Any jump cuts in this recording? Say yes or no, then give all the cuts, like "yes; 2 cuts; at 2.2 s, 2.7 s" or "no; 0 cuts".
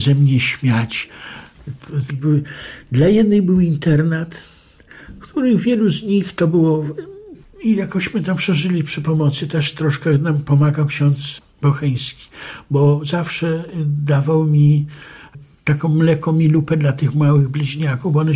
yes; 2 cuts; at 2.1 s, 7.4 s